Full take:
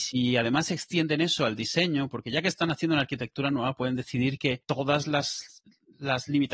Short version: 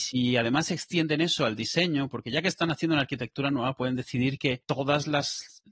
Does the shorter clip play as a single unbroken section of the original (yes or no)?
yes